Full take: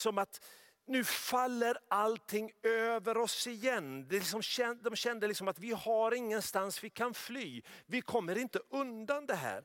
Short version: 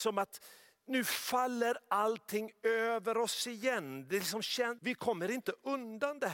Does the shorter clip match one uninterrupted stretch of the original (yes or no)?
no